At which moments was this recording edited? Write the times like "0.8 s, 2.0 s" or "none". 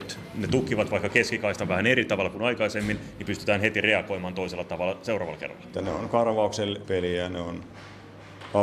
5.7 s, 6.8 s